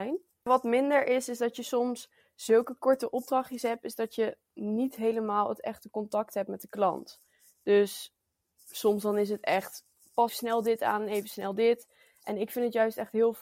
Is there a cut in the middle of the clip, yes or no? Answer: yes